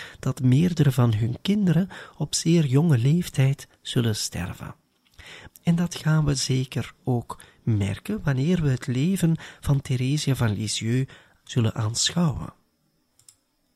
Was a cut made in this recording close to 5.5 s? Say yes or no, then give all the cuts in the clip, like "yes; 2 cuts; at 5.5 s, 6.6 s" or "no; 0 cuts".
yes; 1 cut; at 5.5 s